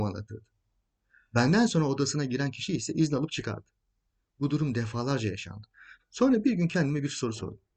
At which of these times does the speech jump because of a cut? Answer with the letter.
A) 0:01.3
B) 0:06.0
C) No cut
B